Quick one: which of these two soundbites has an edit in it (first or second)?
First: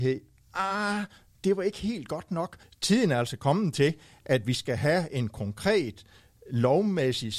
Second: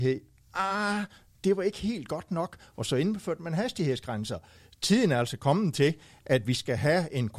first